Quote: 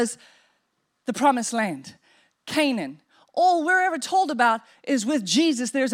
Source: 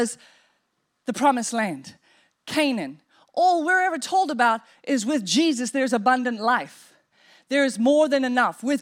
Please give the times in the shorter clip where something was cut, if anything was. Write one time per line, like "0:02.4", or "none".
none